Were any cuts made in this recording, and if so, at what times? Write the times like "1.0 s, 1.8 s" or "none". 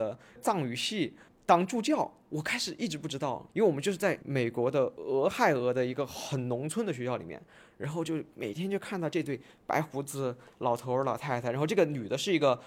none